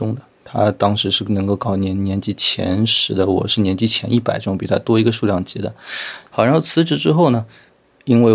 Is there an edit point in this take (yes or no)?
yes